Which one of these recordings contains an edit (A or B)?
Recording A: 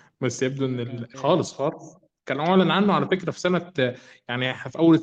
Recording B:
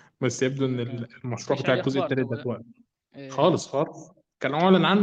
A